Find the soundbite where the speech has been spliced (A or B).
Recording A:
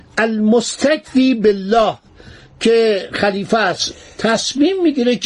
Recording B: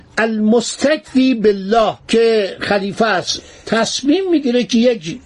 B